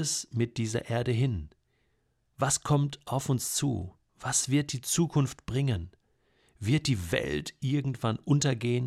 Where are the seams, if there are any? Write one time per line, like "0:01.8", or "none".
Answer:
none

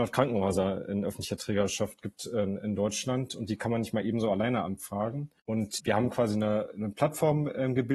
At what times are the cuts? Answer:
0:05.4

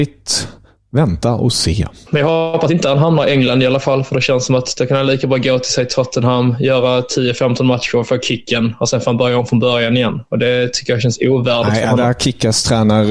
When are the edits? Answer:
0:02.1

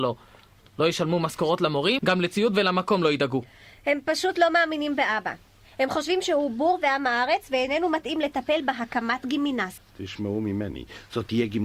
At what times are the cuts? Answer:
0:02.0
0:09.8

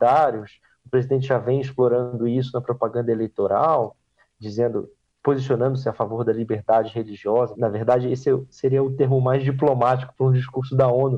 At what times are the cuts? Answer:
0:07.6

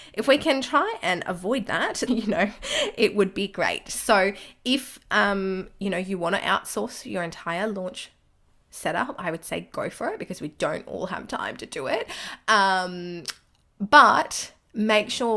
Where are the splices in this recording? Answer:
0:02.1

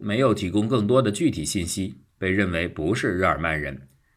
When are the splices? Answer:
0:02.2

